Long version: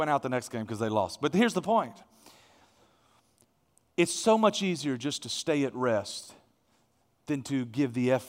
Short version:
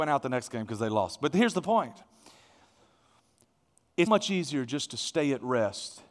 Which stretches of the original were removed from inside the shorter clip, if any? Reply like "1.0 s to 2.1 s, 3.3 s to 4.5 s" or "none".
4.1 s to 4.4 s